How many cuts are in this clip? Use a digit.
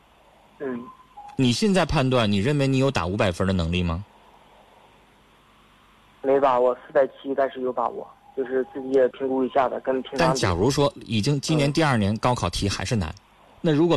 1